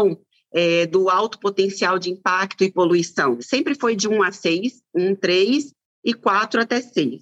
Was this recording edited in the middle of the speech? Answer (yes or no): no